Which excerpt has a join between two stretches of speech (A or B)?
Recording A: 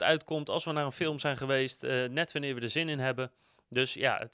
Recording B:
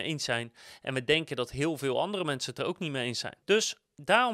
B